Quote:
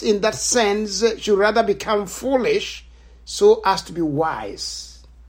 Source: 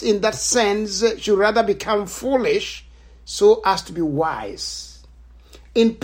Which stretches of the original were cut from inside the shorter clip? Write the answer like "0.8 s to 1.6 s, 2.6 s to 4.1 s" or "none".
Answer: none